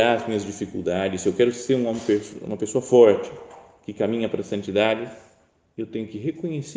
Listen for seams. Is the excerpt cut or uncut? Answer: uncut